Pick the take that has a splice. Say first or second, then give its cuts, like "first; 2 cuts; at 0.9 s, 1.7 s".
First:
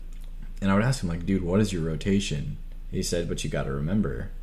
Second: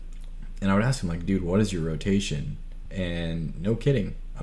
first; 1 cut; at 2.9 s